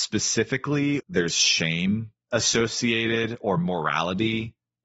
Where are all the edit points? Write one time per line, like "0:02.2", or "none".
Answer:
0:01.0

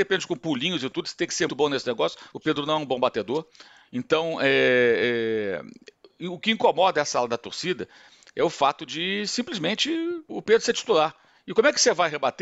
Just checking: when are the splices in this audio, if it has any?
0:01.5
0:10.3

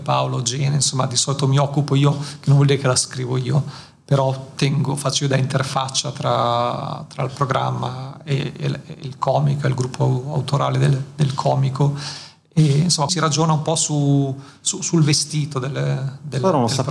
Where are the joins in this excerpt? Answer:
0:13.1

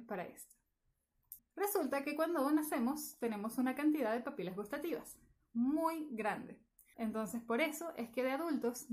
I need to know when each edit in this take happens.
0:01.4
0:06.9

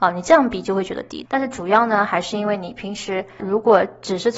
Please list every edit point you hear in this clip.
0:01.3

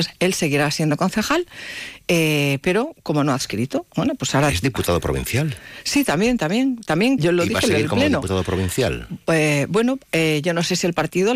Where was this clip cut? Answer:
0:07.2

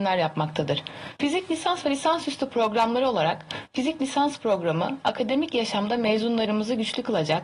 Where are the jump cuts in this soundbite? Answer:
0:01.2

